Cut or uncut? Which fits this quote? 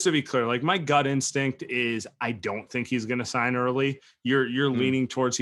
uncut